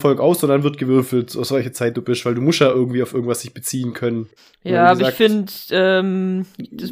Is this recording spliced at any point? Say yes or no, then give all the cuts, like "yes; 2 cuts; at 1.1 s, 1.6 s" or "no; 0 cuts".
no; 0 cuts